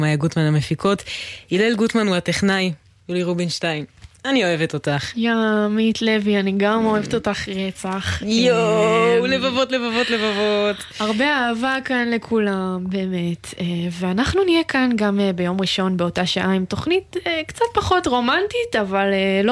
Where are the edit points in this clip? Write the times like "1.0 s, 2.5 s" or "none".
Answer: none